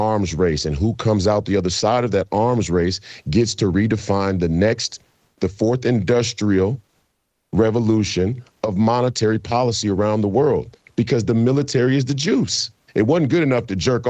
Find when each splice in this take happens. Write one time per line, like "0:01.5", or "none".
0:12.9